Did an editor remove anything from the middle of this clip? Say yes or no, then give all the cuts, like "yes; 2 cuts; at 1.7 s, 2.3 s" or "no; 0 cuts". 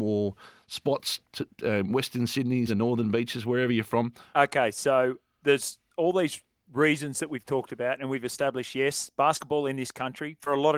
yes; 2 cuts; at 2.7 s, 4.3 s